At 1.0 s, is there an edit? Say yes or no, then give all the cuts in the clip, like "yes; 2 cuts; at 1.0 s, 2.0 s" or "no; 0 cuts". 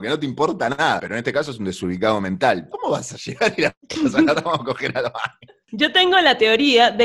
yes; 2 cuts; at 1.0 s, 2.7 s